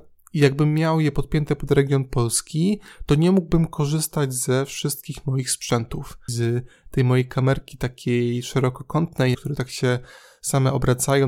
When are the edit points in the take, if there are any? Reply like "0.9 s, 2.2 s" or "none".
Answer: 6.3 s, 9.3 s